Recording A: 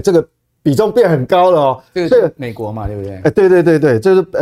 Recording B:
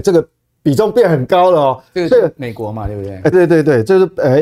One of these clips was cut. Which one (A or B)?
B